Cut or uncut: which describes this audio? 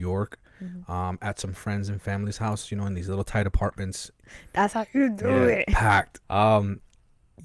cut